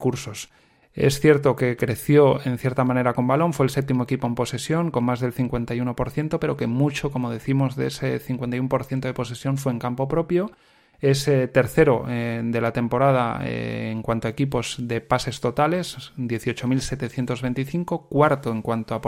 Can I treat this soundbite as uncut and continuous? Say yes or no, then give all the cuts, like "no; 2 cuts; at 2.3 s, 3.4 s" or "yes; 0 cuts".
no; 1 cut; at 1.8 s